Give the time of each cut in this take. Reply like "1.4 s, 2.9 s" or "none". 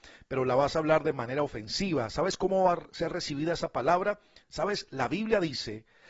4.4 s